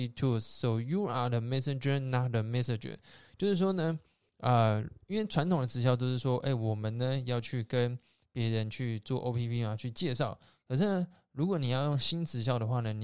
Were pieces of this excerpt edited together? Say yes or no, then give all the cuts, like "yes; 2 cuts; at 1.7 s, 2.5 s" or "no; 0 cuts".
no; 0 cuts